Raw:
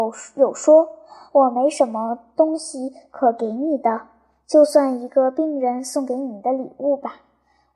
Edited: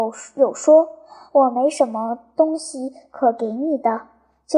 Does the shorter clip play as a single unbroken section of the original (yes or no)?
yes